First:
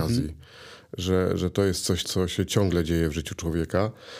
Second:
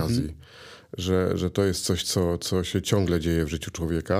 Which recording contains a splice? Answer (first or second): first